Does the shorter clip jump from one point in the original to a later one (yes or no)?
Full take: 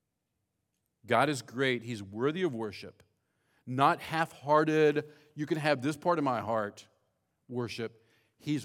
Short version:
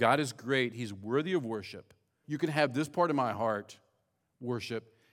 yes